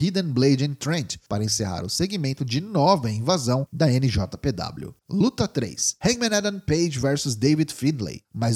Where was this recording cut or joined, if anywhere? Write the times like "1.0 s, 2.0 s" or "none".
5.0 s